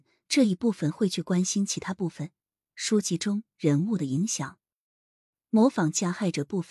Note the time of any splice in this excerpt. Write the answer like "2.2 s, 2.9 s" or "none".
2.7 s